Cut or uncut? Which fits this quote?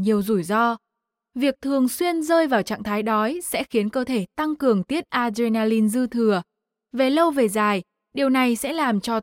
uncut